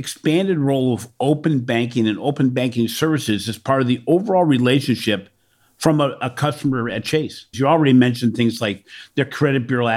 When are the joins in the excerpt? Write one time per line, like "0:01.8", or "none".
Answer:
0:07.5